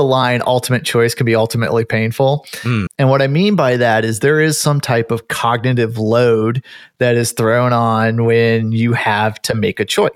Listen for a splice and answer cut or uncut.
cut